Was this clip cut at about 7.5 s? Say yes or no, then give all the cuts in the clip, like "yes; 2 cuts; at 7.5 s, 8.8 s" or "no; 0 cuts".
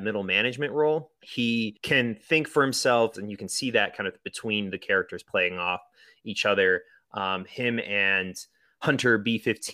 no; 1 cut; at 3.1 s